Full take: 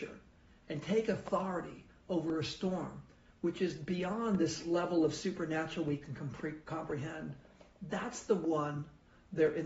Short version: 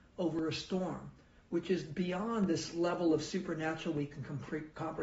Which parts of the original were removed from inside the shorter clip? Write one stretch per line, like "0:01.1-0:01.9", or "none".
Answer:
none